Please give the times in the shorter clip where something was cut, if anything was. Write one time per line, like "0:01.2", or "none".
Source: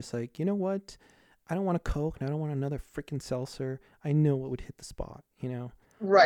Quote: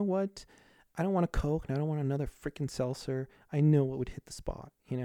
none